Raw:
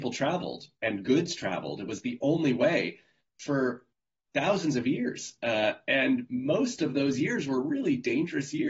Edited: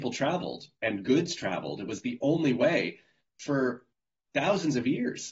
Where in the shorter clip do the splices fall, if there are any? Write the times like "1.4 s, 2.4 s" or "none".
none